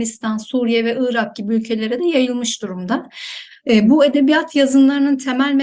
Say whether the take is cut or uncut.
uncut